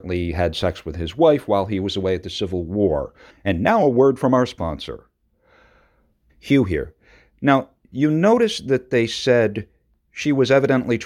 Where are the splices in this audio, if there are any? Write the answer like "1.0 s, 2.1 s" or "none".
3.3 s, 6.3 s